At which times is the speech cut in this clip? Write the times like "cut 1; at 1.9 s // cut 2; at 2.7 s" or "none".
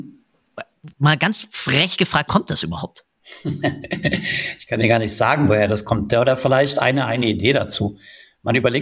cut 1; at 0.9 s // cut 2; at 2.3 s